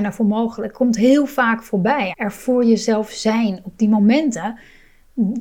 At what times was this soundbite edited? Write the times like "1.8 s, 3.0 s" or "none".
2.1 s